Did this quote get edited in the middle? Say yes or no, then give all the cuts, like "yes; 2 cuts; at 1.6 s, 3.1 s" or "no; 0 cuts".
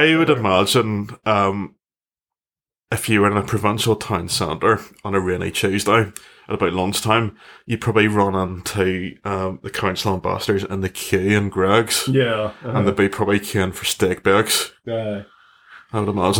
no; 0 cuts